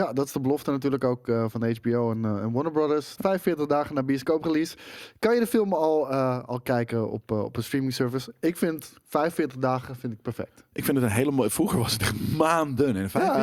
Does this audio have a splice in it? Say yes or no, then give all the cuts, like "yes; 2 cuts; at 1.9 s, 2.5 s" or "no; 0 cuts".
yes; 1 cut; at 3.2 s